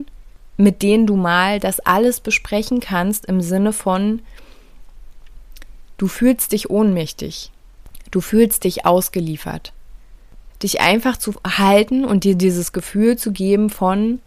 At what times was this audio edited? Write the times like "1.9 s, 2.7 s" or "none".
10.5 s